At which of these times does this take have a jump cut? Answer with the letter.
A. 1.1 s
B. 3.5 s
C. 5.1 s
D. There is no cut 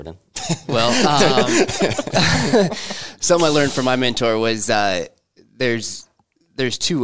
D